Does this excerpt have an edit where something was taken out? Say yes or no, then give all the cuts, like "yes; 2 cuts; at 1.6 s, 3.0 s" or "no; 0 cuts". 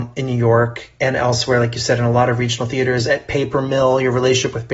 no; 0 cuts